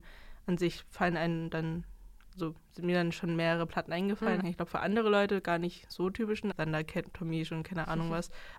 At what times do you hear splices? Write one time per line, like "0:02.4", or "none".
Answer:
0:04.4
0:06.5